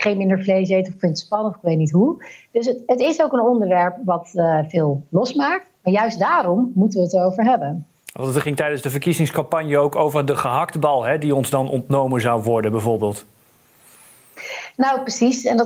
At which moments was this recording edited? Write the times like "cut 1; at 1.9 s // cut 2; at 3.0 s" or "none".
none